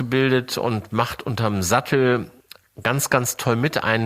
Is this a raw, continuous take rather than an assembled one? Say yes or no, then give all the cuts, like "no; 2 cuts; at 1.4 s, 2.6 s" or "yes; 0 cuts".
yes; 0 cuts